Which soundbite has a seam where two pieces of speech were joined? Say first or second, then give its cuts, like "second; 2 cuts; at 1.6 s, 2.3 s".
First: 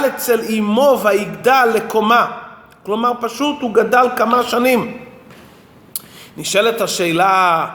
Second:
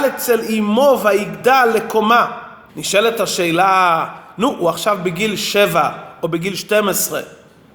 second; 1 cut; at 2.7 s